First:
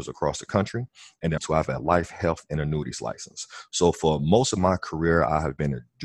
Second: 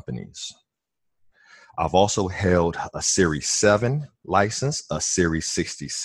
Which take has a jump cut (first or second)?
first